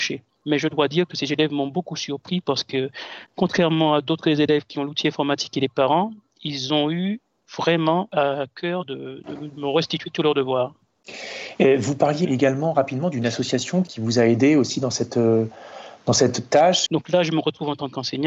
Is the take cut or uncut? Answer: cut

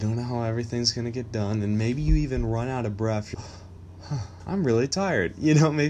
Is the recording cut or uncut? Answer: cut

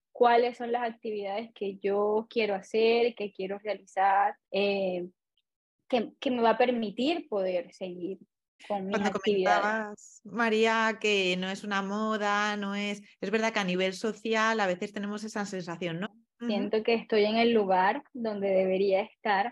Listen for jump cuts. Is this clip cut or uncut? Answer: cut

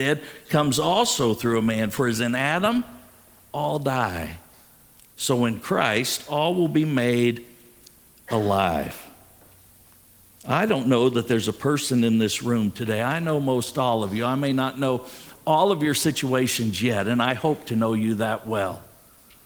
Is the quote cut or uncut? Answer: uncut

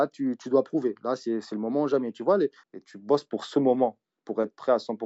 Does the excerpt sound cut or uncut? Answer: cut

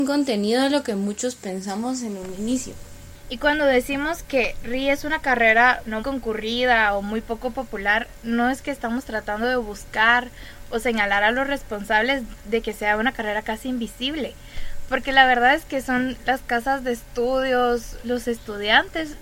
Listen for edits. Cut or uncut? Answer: cut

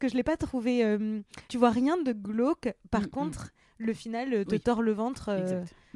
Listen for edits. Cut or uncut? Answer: cut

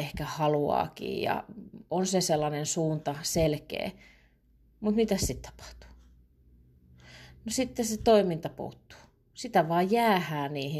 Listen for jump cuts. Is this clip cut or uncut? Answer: uncut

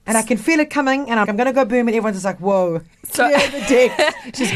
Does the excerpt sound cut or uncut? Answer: cut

